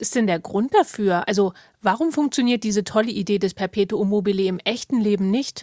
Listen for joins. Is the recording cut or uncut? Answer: uncut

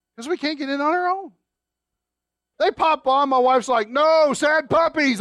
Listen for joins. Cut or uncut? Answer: cut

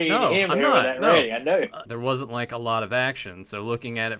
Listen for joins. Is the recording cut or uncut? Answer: cut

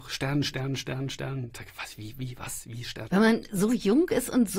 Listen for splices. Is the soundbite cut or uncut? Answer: cut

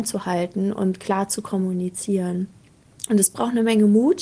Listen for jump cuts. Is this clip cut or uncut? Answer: uncut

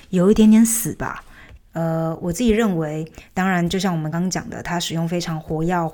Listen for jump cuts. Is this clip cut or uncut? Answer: cut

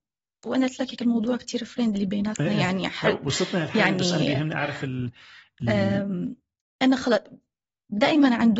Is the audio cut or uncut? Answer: uncut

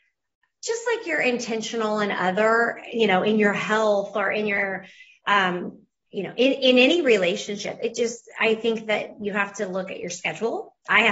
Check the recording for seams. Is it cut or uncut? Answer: uncut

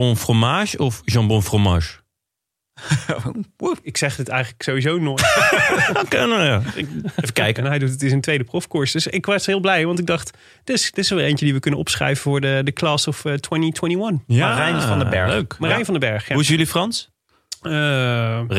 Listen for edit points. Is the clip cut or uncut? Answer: cut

